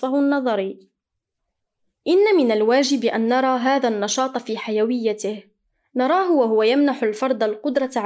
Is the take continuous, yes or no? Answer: yes